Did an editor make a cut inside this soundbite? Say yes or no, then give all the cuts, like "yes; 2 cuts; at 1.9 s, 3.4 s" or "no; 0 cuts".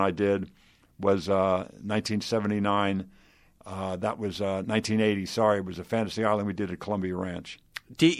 no; 0 cuts